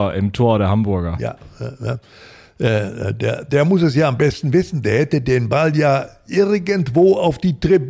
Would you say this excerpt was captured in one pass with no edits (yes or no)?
yes